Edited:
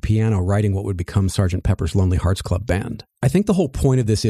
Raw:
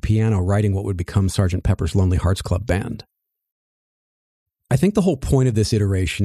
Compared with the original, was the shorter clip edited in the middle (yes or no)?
yes